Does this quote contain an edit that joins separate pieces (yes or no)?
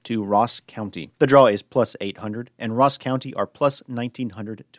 yes